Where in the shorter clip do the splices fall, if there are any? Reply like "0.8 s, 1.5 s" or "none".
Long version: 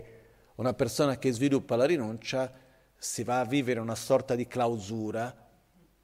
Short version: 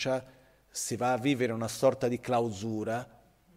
none